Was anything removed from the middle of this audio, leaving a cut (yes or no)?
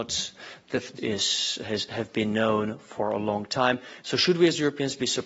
yes